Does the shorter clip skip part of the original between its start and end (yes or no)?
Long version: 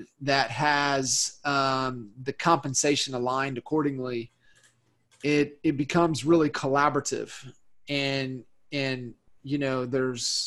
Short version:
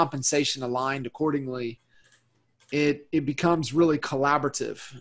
no